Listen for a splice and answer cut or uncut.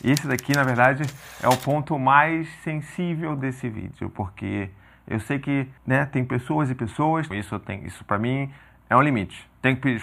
cut